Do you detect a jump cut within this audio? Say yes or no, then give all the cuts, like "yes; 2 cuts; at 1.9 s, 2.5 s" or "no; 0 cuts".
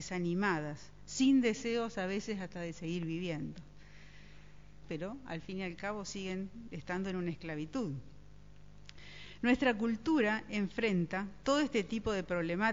yes; 1 cut; at 4.8 s